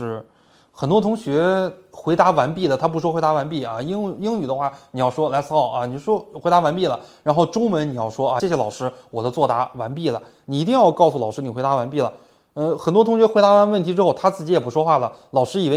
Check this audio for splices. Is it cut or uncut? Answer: cut